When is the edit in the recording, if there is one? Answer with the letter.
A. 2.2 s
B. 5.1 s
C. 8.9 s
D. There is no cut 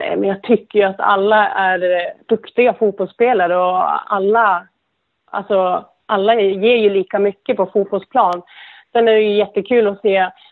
A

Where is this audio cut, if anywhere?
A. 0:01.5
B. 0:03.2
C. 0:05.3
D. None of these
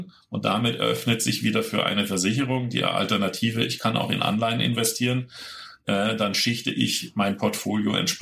D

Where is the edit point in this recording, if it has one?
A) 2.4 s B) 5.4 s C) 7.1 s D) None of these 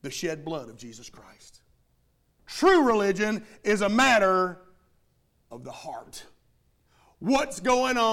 A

